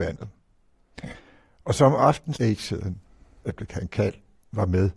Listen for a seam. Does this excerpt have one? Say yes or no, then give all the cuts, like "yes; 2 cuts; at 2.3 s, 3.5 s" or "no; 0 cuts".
yes; 1 cut; at 2.3 s